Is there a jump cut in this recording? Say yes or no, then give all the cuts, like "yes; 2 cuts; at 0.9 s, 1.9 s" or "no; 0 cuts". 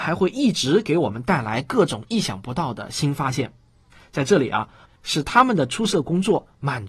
yes; 1 cut; at 4.8 s